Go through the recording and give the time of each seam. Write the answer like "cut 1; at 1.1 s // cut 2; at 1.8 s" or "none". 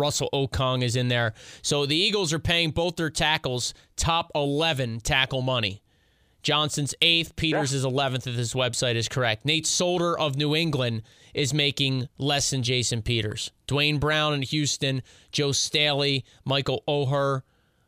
none

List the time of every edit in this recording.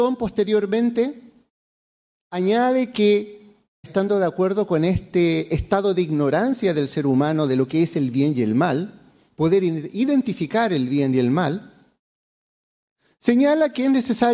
cut 1; at 3.8 s

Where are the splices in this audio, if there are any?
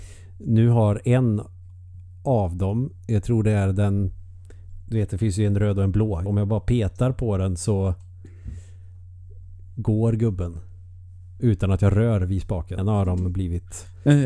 cut 1; at 6.3 s // cut 2; at 12.8 s

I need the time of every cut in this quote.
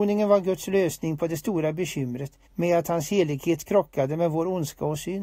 cut 1; at 2.5 s

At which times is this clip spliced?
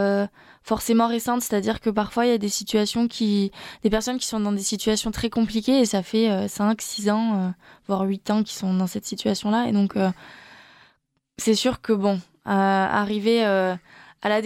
none

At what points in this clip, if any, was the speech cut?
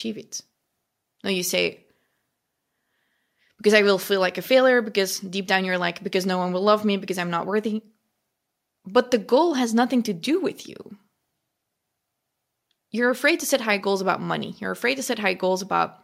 none

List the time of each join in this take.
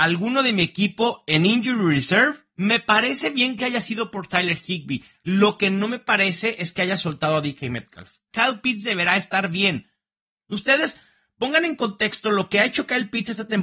cut 1; at 2.5 s // cut 2; at 8.3 s

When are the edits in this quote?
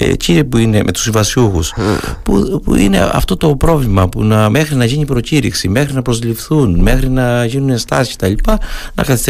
none

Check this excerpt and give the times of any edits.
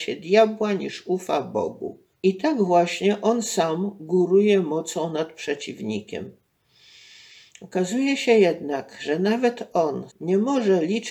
cut 1; at 2.1 s // cut 2; at 10.1 s

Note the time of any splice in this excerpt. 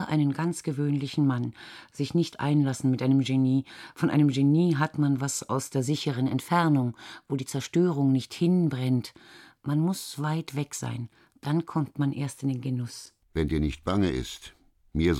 cut 1; at 13.2 s

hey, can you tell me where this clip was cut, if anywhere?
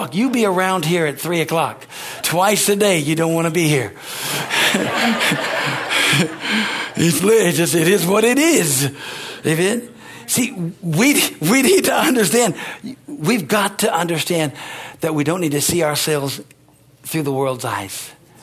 cut 1; at 2.2 s // cut 2; at 7.2 s

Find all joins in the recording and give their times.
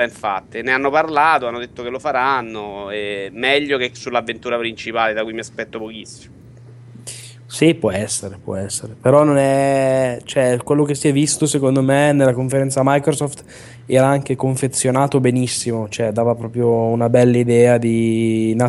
none

